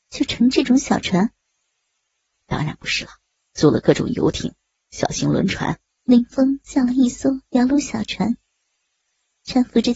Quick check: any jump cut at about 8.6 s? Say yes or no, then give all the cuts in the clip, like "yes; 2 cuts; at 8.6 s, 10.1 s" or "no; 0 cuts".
no; 2 cuts; at 3.5 s, 6.0 s